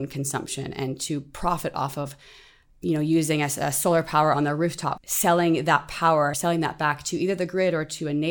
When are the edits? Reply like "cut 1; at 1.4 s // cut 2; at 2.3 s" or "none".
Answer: cut 1; at 5.0 s // cut 2; at 6.3 s

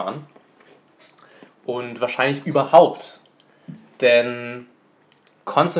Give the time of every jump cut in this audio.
none

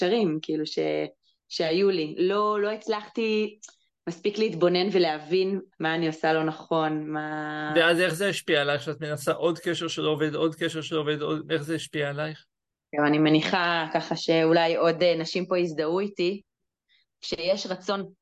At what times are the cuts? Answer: cut 1; at 5.7 s

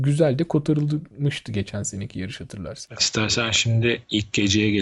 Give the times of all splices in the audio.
cut 1; at 3.0 s

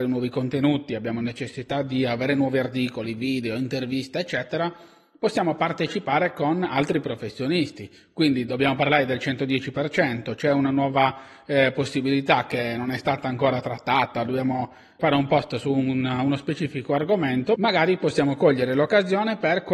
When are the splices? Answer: cut 1; at 15.0 s

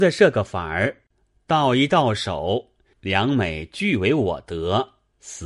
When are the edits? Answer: cut 1; at 2.9 s

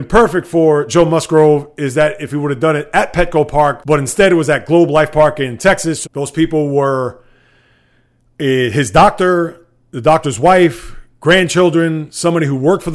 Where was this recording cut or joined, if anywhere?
cut 1; at 6.0 s

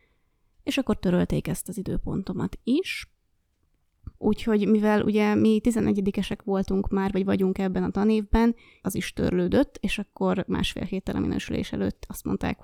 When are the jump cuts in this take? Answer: cut 1; at 4.1 s // cut 2; at 8.8 s

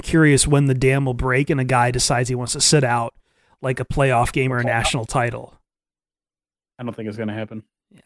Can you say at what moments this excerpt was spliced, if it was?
none

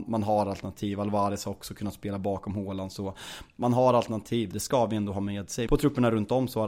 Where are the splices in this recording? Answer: cut 1; at 4.5 s // cut 2; at 5.7 s

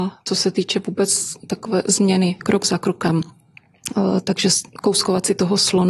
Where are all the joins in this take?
cut 1; at 2.4 s

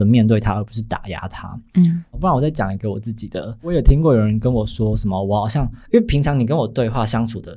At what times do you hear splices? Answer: none

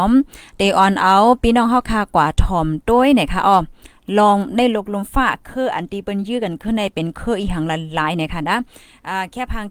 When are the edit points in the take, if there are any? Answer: none

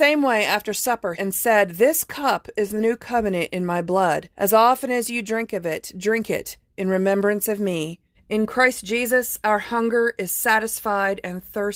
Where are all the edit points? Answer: cut 1; at 1.1 s // cut 2; at 4.3 s // cut 3; at 8.1 s

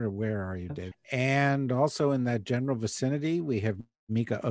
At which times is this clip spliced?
cut 1; at 0.9 s

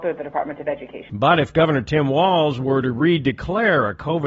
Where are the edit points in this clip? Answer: cut 1; at 1.1 s

